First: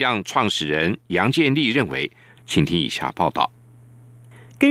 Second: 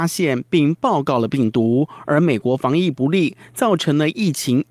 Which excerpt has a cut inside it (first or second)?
first